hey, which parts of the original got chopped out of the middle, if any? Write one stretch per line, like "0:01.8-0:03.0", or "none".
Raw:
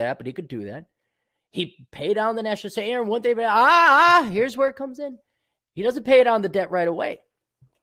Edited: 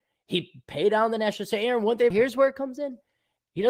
0:03.3-0:04.3